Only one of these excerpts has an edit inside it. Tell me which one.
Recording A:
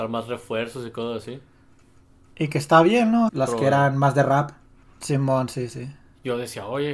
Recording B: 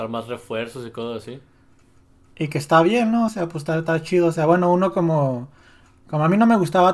A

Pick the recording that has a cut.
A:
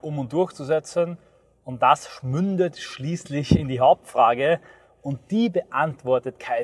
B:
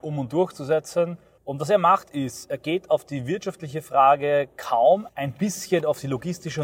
B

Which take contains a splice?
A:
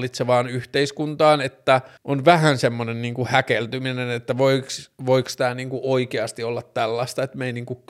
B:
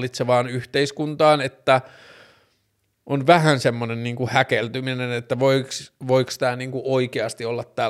A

